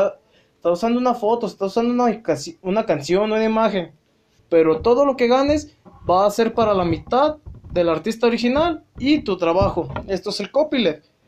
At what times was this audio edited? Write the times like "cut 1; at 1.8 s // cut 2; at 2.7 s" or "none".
cut 1; at 4.4 s